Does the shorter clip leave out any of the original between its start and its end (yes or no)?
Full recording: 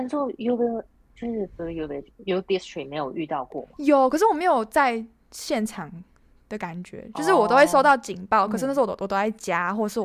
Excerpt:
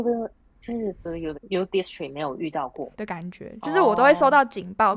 yes